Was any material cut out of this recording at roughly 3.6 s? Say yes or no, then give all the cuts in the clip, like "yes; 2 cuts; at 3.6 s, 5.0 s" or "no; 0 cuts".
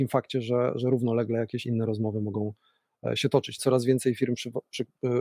yes; 1 cut; at 3.6 s